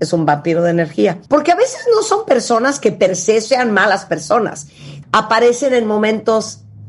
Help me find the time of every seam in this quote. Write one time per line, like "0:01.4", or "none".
0:01.3
0:05.0